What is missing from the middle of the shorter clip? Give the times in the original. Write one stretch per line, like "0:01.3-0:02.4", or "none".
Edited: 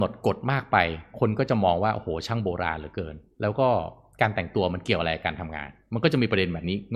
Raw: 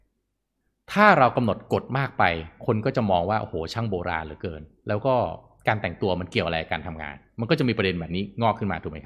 none